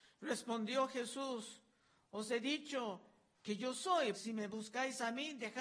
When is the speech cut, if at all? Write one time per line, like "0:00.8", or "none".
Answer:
0:04.1

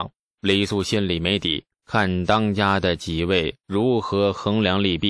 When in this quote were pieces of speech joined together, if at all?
0:01.7

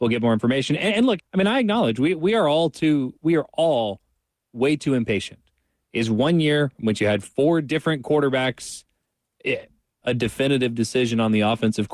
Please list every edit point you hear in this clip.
0:01.2
0:10.0

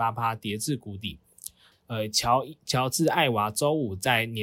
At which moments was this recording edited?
0:01.7

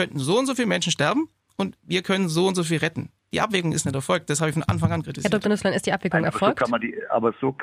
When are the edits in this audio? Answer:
none

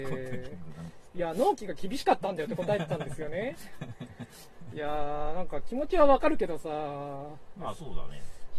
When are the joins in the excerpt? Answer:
none

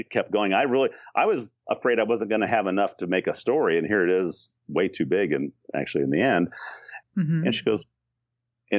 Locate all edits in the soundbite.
0:07.0

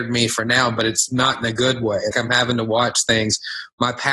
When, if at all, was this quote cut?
0:02.1

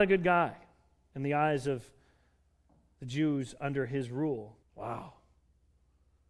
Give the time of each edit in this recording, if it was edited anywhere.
0:04.6

